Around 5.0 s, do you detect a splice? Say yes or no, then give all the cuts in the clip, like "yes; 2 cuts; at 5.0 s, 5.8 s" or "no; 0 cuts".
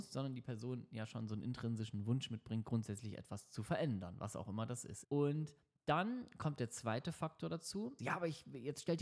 yes; 2 cuts; at 5.0 s, 8.0 s